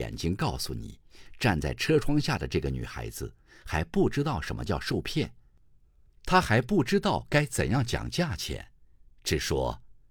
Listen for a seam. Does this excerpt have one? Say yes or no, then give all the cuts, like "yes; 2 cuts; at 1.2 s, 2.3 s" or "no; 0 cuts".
no; 0 cuts